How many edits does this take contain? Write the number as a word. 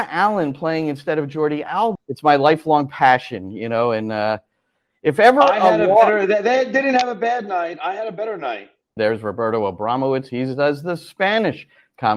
two